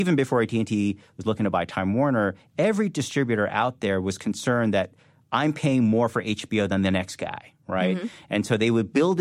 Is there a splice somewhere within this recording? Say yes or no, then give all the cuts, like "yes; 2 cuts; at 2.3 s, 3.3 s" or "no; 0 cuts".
no; 0 cuts